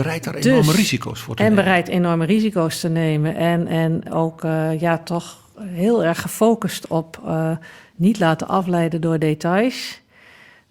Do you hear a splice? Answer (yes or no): no